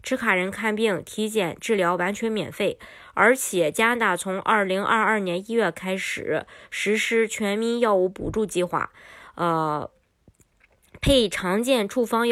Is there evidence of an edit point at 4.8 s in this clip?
no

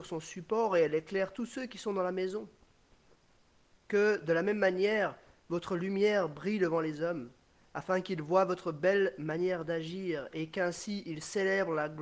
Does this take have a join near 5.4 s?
no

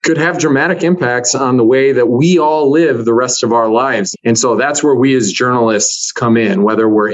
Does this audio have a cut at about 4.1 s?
yes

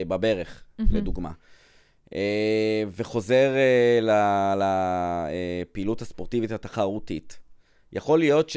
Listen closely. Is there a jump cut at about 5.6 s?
no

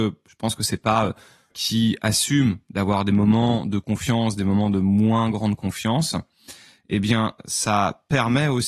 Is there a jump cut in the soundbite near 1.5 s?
yes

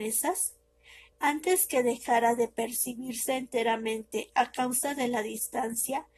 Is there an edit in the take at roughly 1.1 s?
yes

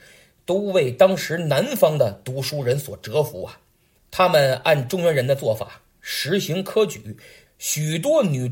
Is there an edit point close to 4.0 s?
yes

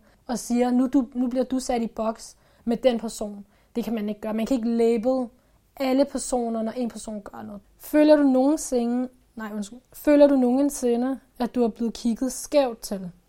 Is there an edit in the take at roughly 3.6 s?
no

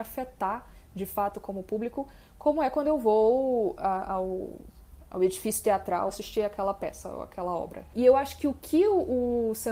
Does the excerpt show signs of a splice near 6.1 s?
yes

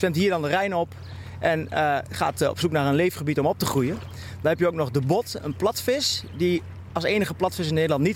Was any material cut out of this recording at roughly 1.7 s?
no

